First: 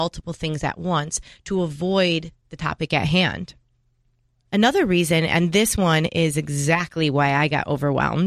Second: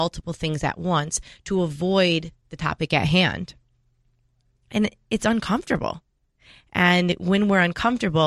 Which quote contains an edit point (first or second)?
first